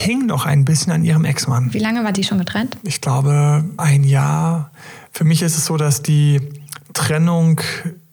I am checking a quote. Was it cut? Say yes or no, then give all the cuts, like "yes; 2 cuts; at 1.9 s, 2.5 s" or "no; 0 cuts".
yes; 1 cut; at 3.8 s